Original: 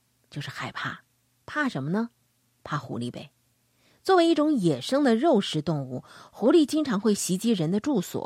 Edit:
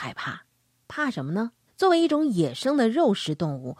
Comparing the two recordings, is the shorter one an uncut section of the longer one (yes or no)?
no